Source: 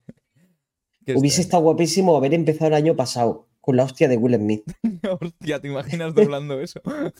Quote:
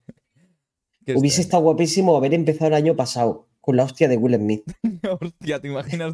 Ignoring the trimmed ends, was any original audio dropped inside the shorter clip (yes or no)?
no